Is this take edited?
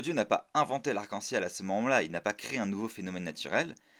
no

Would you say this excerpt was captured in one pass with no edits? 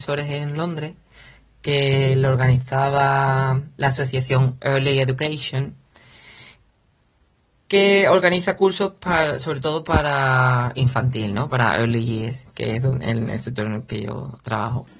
yes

